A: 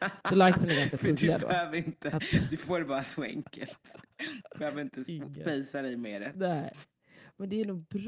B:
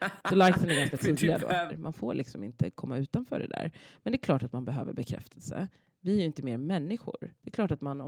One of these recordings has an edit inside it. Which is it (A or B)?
B